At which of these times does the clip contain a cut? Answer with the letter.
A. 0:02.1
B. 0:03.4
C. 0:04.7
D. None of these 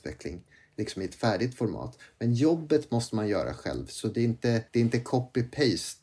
C